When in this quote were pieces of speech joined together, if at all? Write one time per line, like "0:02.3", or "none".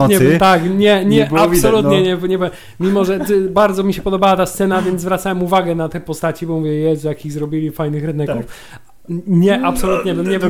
none

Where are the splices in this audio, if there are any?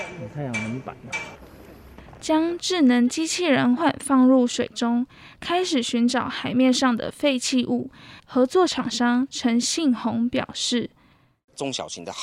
0:03.8
0:08.2

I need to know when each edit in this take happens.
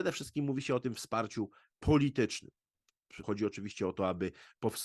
0:03.2

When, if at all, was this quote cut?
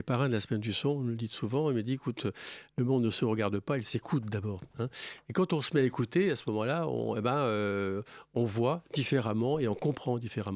none

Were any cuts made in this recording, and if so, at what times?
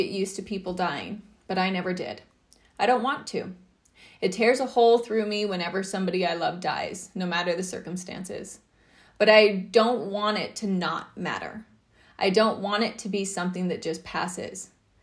none

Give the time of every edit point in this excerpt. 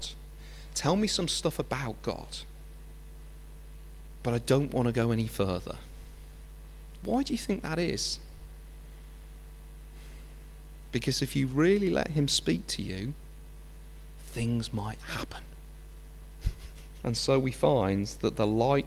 0:17.0

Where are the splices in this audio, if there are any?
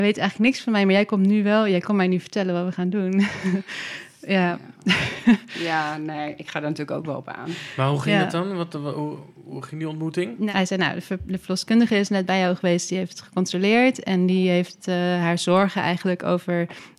none

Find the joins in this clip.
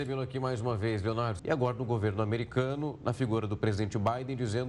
0:01.4

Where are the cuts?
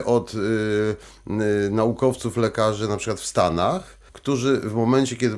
0:04.1

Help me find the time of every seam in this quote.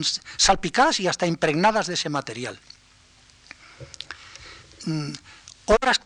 none

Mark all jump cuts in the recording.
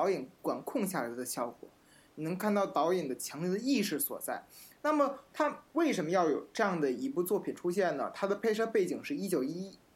none

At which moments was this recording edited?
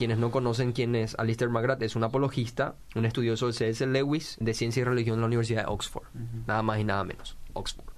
0:04.4

